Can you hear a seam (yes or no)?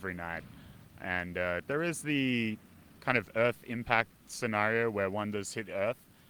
yes